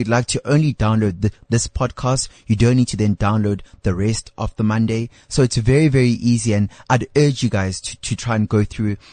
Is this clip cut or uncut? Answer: uncut